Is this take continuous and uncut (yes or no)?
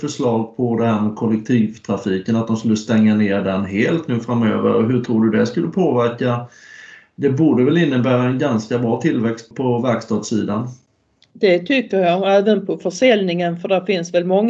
no